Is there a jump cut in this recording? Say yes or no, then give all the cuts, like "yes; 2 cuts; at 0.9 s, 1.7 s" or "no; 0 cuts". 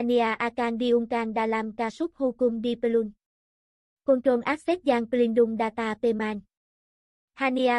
no; 0 cuts